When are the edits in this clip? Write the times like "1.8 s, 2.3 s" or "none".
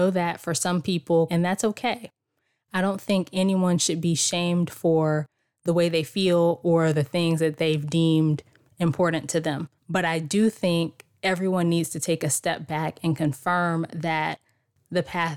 1.3 s, 9.8 s